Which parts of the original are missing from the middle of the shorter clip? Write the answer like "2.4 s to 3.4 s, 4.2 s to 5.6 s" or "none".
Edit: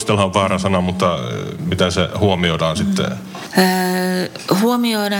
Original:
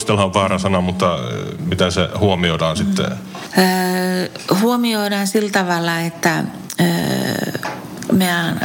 none